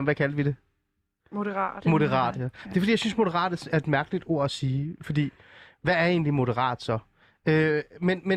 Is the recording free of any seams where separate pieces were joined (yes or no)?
yes